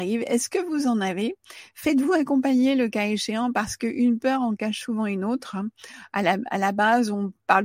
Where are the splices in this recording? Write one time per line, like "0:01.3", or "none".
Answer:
none